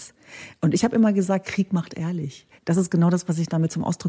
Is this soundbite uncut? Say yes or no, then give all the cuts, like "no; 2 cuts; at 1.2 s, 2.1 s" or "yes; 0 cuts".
no; 1 cut; at 2.6 s